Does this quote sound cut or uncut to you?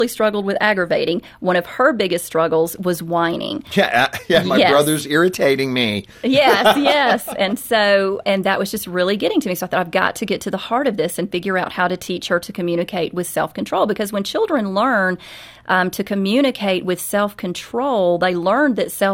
uncut